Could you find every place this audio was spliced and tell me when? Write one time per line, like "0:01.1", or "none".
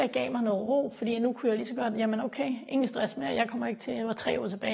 none